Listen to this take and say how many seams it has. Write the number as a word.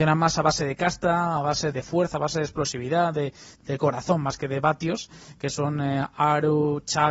two